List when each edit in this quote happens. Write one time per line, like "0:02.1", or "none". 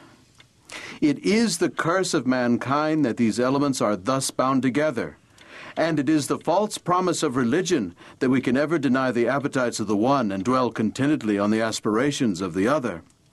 none